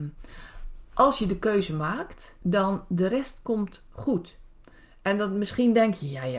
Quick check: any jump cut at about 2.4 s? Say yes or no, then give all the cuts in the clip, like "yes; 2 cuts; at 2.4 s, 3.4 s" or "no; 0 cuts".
yes; 1 cut; at 2.4 s